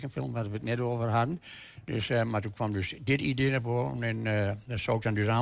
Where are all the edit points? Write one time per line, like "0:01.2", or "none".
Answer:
none

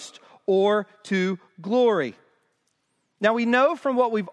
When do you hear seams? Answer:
none

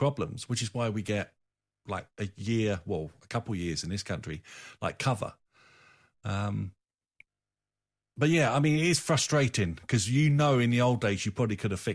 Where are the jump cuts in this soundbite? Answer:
none

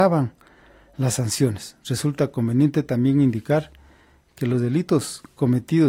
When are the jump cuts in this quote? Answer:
none

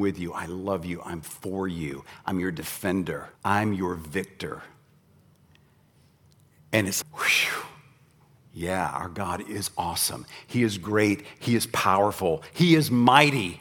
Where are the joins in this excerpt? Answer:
0:03.3
0:07.0

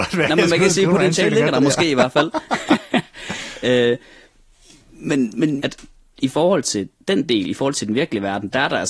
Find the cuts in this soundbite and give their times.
0:05.6

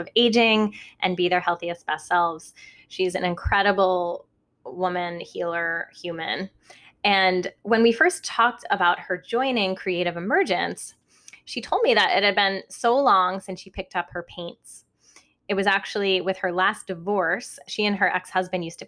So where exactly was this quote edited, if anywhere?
none

